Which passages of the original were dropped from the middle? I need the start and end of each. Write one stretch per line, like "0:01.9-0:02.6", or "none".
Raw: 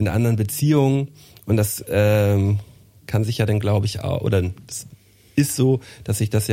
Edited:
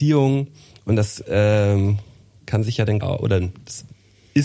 0:03.6-0:04.0